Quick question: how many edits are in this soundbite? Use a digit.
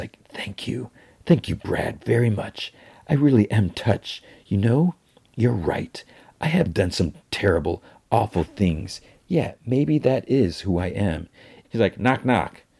1